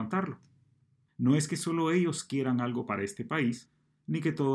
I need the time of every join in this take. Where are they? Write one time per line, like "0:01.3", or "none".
0:01.1